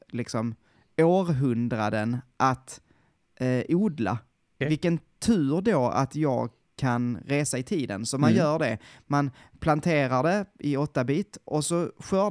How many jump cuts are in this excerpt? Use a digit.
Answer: 1